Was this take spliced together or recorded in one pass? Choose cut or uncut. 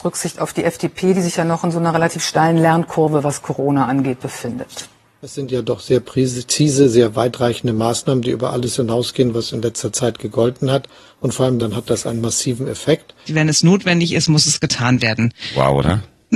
cut